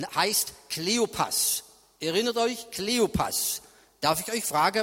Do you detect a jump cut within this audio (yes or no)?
no